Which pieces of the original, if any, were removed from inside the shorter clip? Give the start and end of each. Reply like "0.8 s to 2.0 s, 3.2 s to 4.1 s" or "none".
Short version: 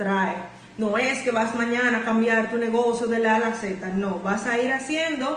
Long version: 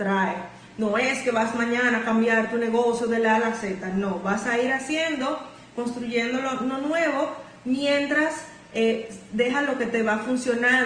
none